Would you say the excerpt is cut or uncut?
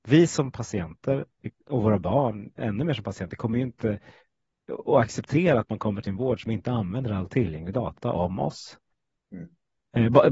uncut